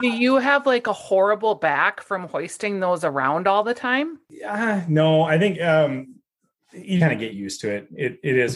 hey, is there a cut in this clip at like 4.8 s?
no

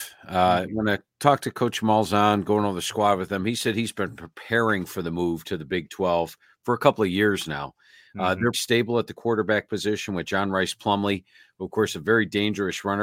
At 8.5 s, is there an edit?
yes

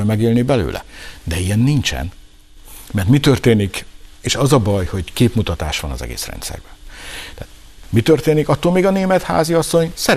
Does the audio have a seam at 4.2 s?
no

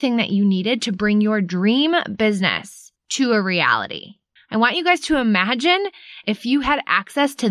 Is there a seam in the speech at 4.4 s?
yes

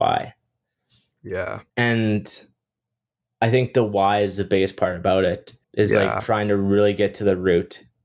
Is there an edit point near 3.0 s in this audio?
no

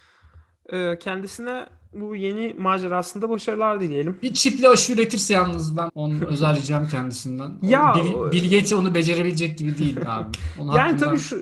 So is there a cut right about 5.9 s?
yes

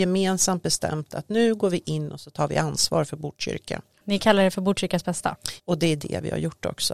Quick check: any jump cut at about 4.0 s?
yes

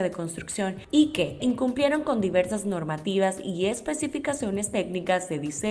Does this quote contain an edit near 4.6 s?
no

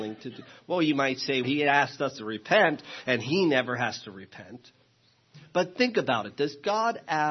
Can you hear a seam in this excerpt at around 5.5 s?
no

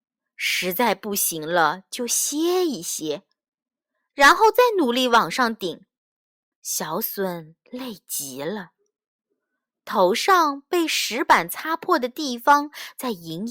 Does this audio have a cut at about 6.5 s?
yes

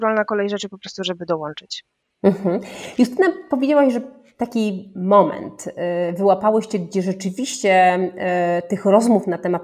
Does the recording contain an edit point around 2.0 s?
no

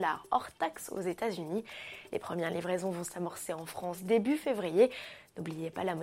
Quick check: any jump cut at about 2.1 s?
no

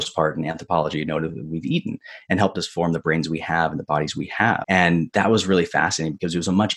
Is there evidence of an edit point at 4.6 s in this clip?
yes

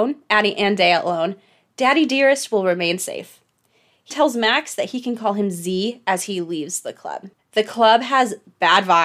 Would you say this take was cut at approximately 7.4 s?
yes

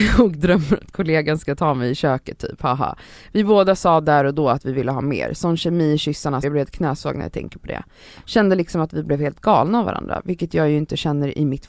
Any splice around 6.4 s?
yes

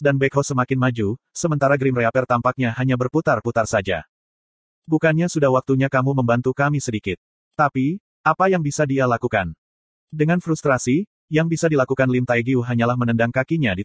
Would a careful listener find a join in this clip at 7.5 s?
yes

